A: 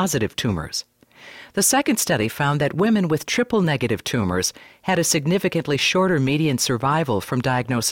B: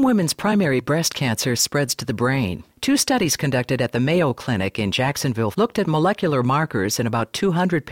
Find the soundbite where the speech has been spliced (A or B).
B